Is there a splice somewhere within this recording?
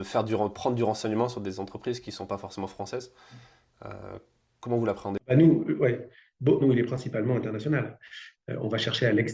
yes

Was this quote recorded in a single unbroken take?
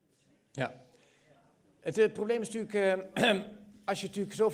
yes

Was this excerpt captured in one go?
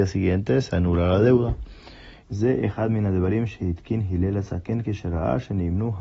no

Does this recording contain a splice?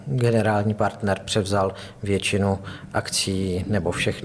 no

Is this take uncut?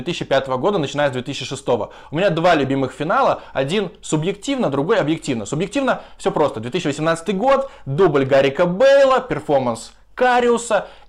yes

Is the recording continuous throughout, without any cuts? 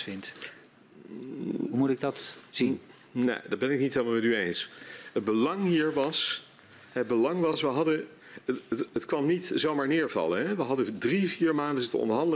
yes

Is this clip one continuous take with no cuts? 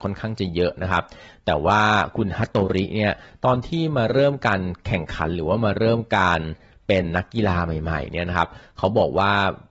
yes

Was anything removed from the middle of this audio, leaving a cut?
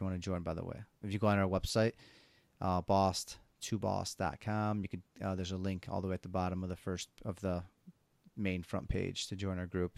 yes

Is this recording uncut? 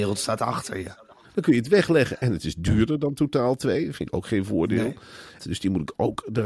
no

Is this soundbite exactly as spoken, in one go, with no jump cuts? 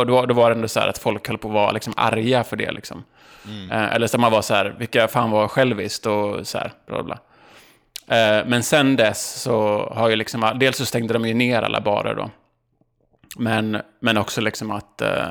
yes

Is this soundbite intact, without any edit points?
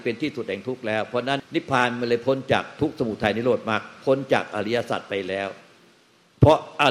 no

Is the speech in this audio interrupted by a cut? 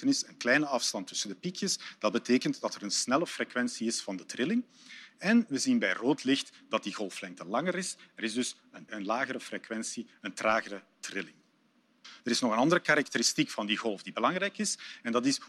yes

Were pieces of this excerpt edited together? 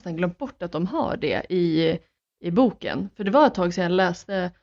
no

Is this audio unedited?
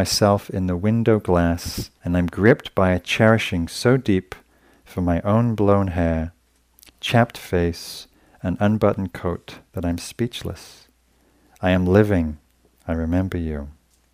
no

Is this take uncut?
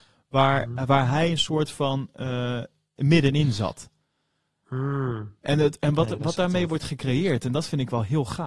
no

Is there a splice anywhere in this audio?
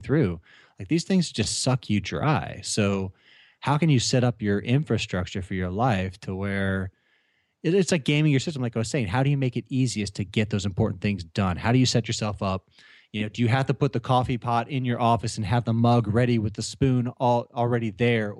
no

